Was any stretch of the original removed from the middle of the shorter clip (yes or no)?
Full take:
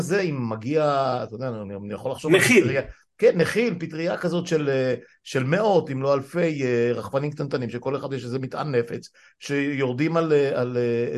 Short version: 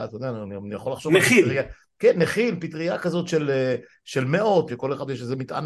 yes